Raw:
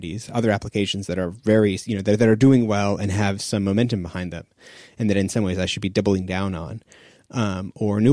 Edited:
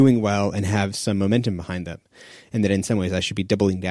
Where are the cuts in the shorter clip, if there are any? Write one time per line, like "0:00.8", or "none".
none